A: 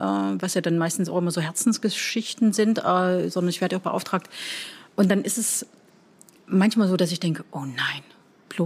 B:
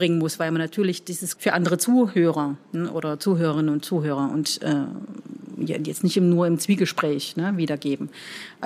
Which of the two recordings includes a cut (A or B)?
B